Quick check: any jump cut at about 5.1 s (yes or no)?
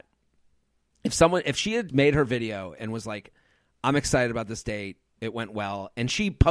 no